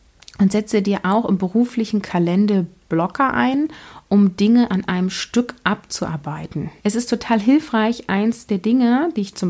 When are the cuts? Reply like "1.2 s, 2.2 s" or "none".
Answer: 6.8 s